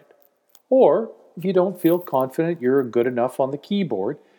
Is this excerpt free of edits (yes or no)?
yes